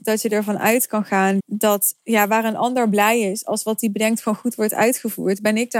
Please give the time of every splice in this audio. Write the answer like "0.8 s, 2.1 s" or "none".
1.4 s